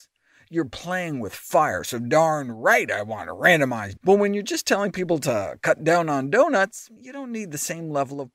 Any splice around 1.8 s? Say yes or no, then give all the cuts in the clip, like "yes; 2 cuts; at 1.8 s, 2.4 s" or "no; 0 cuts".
no; 2 cuts; at 4.0 s, 7.0 s